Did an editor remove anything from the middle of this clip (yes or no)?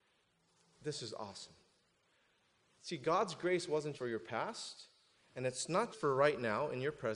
yes